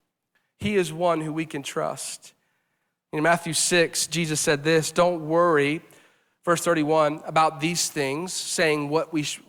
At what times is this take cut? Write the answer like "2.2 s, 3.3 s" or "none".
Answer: none